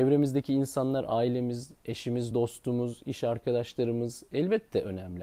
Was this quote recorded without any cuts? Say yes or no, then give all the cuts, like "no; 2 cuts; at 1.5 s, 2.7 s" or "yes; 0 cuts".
yes; 0 cuts